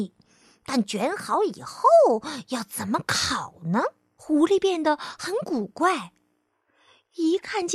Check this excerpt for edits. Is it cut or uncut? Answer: cut